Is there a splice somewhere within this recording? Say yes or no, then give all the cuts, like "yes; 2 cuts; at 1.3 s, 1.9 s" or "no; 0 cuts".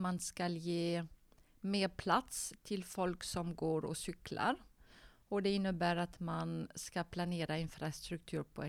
no; 0 cuts